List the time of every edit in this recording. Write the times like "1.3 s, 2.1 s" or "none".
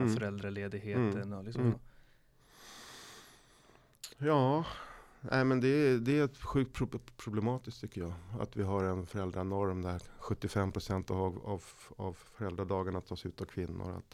1.7 s